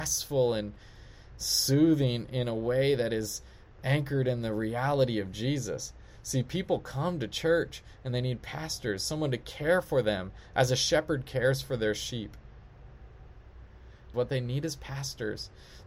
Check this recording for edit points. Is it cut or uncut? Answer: cut